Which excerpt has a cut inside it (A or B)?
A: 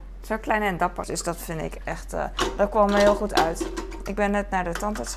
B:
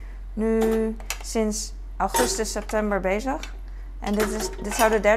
A